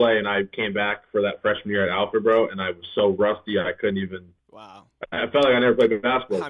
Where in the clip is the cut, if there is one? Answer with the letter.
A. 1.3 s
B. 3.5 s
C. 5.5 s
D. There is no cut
D